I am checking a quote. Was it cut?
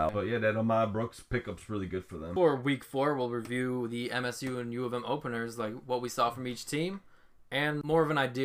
no; 0 cuts

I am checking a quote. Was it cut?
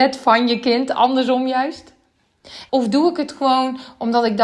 yes; 1 cut; at 2.7 s

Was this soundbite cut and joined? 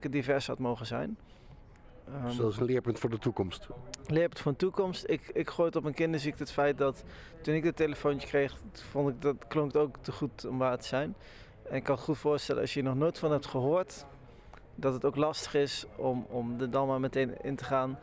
no; 0 cuts

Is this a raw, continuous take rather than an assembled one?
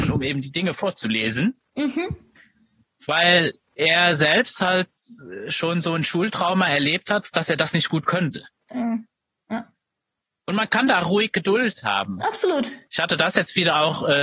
no; 2 cuts; at 7.3 s, 8.7 s

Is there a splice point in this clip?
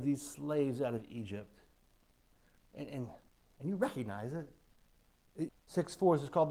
yes; 2 cuts; at 2.6 s, 5.5 s

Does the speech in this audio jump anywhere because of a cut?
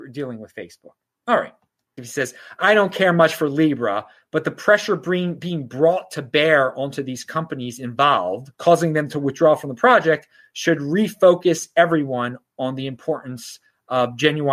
yes; 2 cuts; at 2.0 s, 8.5 s

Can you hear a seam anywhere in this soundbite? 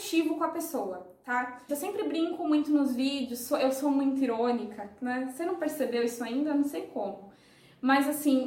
yes; 1 cut; at 1.7 s

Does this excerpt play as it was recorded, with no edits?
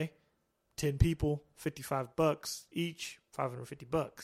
yes; 0 cuts

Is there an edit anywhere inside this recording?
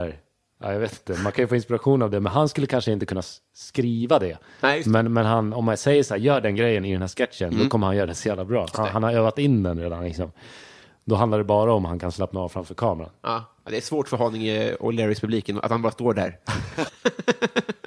yes; 2 cuts; at 8.7 s, 16.9 s

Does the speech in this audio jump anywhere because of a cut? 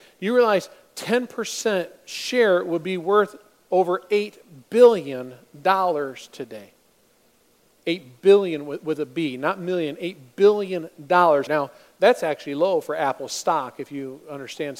yes; 2 cuts; at 7.8 s, 11.5 s

